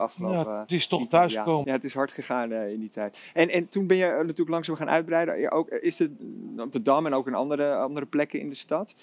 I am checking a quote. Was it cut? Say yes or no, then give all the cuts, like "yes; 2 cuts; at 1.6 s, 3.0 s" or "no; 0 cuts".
yes; 1 cut; at 1.6 s